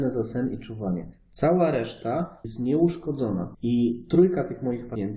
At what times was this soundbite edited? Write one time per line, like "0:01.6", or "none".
none